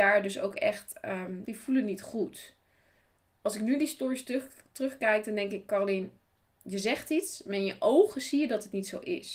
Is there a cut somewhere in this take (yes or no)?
yes